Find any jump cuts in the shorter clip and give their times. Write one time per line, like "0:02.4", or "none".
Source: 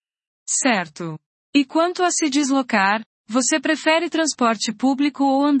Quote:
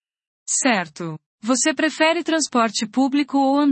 0:01.4